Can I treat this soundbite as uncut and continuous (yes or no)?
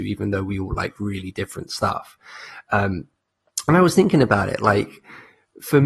yes